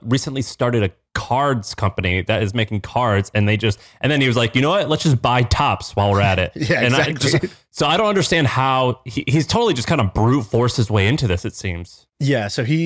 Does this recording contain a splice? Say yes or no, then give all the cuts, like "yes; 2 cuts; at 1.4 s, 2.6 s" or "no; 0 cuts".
no; 0 cuts